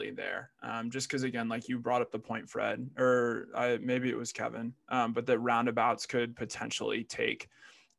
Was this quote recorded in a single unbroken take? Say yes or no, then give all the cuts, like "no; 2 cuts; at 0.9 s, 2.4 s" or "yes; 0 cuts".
yes; 0 cuts